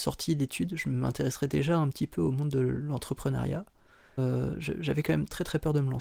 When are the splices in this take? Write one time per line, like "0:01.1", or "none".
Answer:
0:04.2